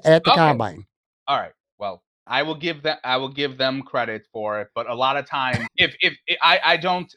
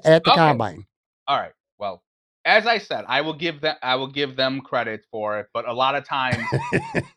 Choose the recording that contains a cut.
first; 2 cuts; at 2.3 s, 5.7 s

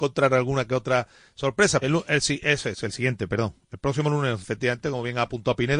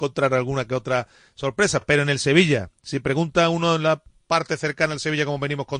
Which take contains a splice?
first; 2 cuts; at 1.8 s, 4.4 s

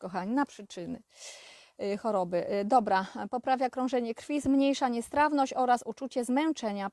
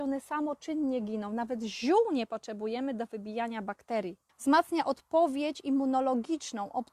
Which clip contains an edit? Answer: second; 1 cut; at 4.3 s

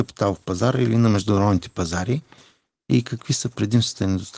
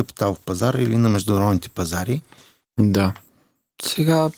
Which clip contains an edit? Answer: second; 1 cut; at 2.6 s

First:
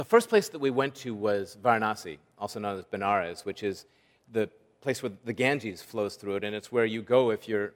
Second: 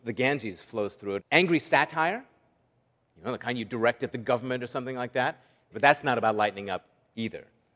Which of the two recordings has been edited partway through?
second; 2 cuts; at 1.2 s, 5.7 s

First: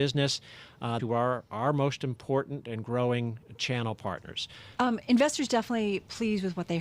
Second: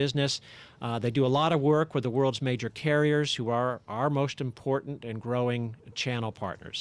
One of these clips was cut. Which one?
first; 2 cuts; at 1.0 s, 4.8 s

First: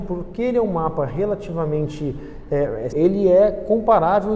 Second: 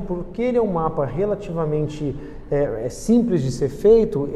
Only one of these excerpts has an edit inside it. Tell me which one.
first; 1 cut; at 2.9 s

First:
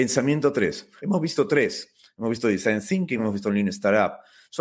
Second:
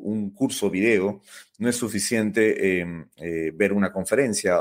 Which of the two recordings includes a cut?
first; 2 cuts; at 1.0 s, 3.2 s

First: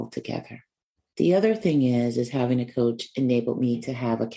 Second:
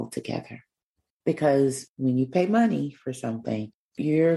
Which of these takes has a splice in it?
second; 1 cut; at 1.1 s

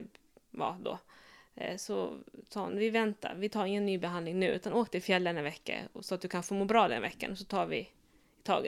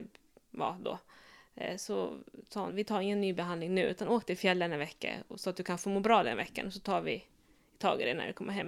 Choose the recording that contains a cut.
second; 1 cut; at 2.7 s

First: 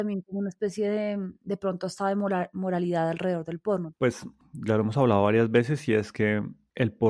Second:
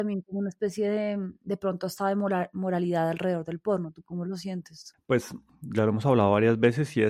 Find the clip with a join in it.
first; 1 cut; at 3.9 s

